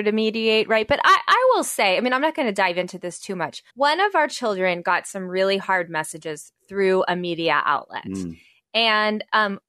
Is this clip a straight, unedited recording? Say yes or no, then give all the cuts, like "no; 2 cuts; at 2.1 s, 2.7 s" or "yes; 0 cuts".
no; 1 cut; at 3.7 s